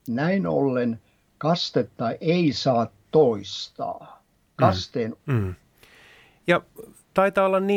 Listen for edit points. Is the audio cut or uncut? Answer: cut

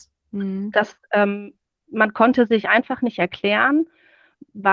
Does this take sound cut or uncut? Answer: uncut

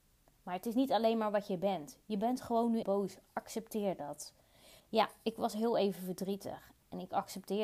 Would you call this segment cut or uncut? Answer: cut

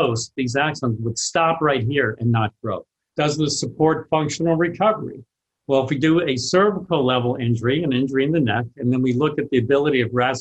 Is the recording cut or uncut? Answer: cut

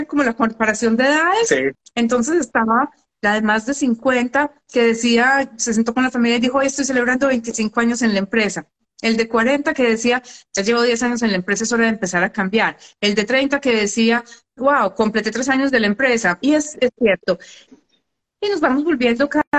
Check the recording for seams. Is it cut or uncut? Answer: cut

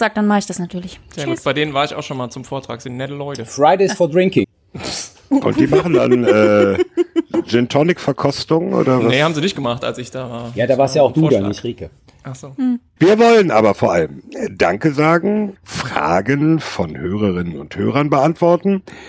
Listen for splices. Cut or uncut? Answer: cut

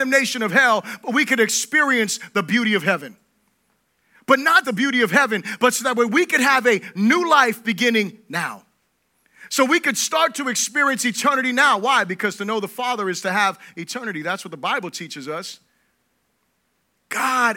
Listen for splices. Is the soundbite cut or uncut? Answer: cut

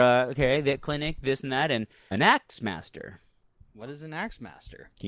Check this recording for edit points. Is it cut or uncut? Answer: cut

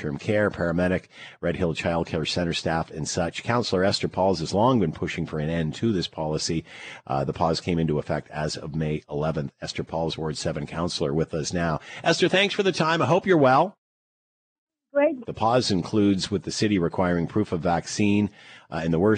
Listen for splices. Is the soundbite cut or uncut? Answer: cut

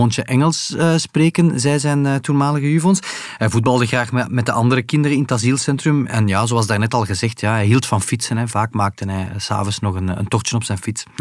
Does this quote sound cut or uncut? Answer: uncut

